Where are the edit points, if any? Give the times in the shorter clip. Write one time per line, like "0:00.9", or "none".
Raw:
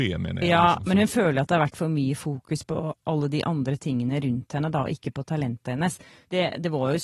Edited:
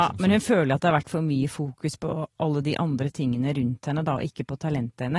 none